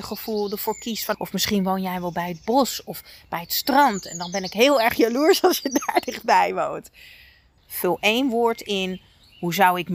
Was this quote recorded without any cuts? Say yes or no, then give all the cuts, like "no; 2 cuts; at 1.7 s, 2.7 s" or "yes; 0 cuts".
no; 2 cuts; at 1.1 s, 7.6 s